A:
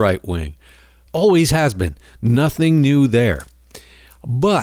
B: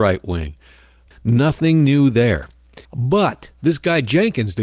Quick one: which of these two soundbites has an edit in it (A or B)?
B